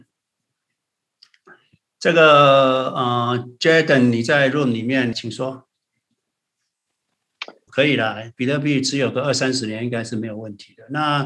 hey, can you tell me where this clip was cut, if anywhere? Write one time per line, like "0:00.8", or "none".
0:05.1
0:07.7